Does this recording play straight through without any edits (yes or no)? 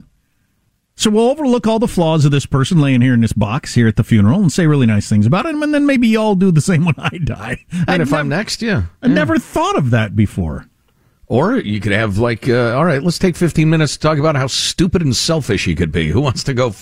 yes